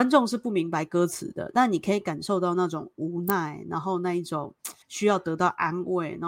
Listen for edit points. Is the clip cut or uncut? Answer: cut